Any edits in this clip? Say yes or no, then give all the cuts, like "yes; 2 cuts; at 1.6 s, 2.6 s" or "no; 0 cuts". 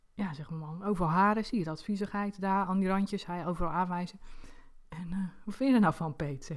no; 0 cuts